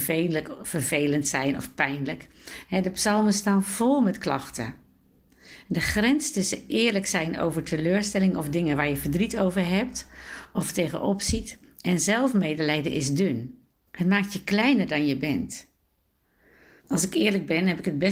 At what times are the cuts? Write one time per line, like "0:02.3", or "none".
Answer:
0:13.9
0:16.8